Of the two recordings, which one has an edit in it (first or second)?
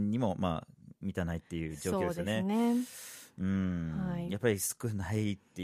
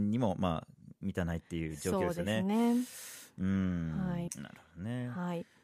second